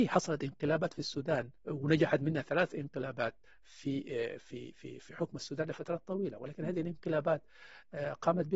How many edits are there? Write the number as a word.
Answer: one